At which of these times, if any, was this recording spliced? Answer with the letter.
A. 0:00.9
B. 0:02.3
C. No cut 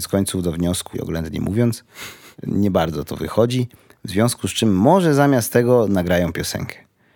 A